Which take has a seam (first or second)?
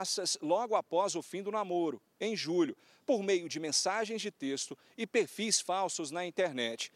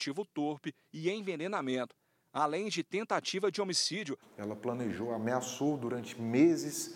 second